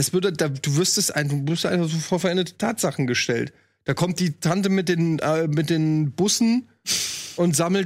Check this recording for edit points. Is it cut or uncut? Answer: uncut